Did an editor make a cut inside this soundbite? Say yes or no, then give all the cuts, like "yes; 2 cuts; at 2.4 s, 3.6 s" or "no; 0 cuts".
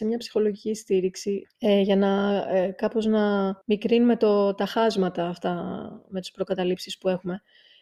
yes; 2 cuts; at 1.4 s, 3.6 s